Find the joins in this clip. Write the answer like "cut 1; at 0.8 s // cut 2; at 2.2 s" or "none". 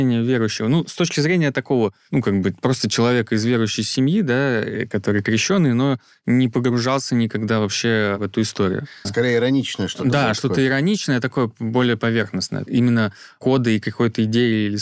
cut 1; at 9.0 s